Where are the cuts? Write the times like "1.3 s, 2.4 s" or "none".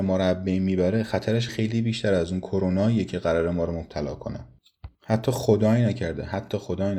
1.5 s